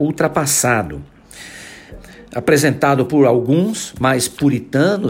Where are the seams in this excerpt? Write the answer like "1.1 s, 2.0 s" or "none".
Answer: 1.9 s